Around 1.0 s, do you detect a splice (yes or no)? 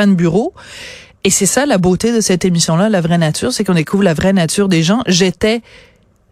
no